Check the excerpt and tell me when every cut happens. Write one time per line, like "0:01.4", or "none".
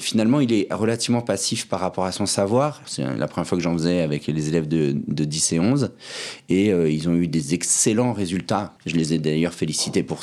0:02.8
0:08.8